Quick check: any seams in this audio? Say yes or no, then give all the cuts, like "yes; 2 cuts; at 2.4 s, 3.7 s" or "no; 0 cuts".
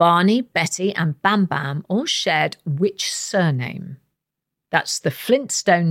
no; 0 cuts